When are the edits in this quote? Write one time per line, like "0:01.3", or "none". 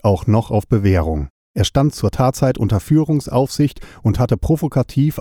0:01.5